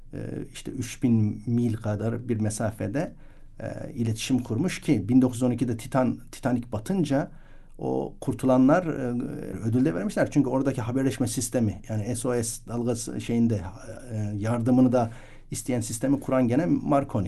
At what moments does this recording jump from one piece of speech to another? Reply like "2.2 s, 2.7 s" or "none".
9.5 s